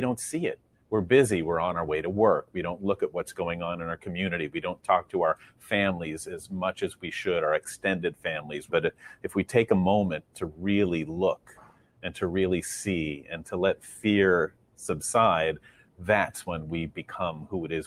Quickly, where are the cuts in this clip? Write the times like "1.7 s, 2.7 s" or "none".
8.7 s